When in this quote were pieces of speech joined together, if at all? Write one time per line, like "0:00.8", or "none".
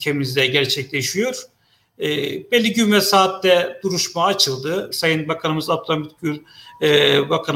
0:04.9